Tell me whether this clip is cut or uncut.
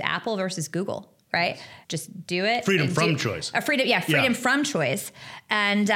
cut